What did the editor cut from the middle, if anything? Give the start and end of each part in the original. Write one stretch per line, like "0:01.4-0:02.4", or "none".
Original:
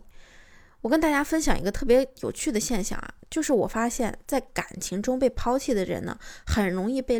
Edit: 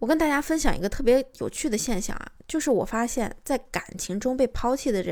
none